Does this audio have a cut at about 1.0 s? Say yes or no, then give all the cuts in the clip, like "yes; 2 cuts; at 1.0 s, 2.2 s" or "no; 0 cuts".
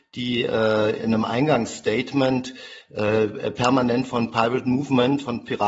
yes; 1 cut; at 1.0 s